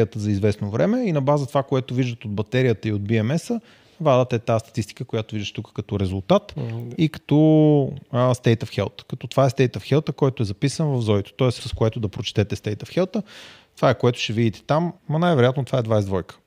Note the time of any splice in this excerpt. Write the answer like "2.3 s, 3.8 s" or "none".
11.6 s, 15.0 s